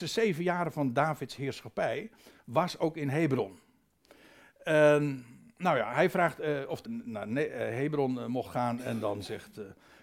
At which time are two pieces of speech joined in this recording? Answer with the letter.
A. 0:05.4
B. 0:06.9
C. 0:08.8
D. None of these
B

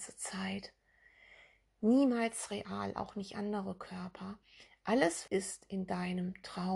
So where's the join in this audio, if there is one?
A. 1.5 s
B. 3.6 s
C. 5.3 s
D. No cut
C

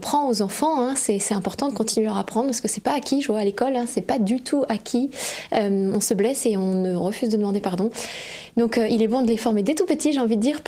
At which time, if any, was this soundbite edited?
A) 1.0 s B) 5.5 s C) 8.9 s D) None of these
D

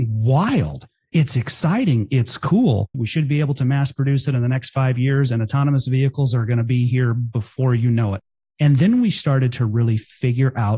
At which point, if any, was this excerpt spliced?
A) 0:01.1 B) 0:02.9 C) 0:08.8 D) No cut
B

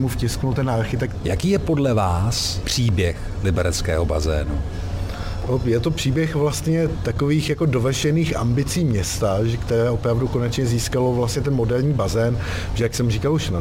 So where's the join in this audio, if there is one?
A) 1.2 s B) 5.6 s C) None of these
A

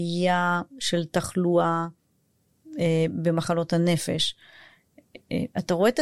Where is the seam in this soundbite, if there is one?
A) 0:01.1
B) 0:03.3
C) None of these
C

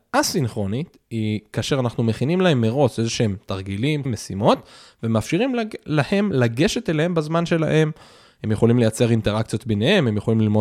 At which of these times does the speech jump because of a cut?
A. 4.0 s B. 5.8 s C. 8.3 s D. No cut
A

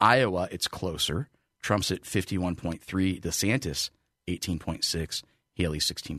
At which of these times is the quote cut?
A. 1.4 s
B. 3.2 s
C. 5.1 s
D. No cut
D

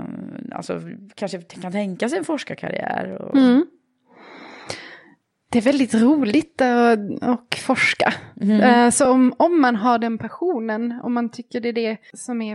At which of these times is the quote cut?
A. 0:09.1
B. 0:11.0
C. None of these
C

